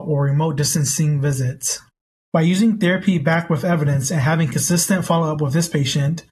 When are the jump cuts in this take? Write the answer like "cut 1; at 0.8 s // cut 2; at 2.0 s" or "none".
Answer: cut 1; at 2.2 s